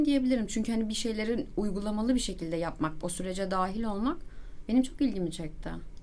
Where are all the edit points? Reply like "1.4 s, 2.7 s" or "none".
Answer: 3.0 s